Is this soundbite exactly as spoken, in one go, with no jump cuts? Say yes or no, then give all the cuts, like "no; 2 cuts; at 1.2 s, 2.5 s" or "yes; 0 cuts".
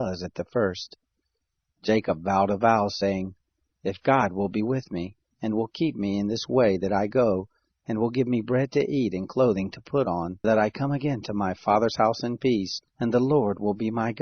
no; 2 cuts; at 10.4 s, 12.9 s